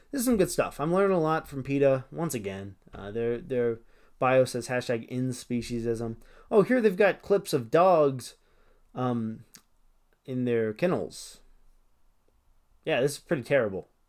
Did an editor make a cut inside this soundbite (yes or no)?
no